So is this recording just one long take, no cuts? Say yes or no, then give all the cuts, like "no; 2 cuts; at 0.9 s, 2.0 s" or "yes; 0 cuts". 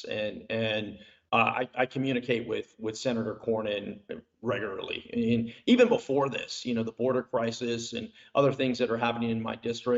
yes; 0 cuts